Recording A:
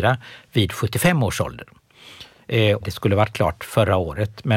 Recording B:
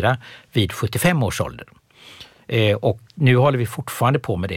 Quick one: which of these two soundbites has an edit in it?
A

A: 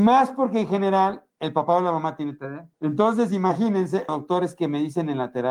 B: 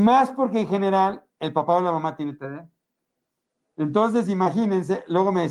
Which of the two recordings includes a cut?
A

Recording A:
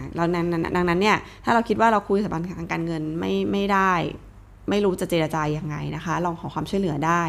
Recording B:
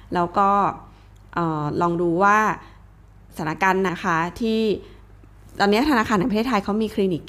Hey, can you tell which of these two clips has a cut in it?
B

